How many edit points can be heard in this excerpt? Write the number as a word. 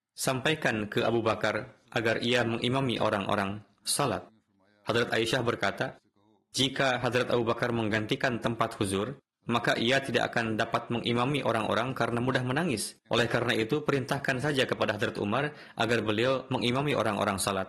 one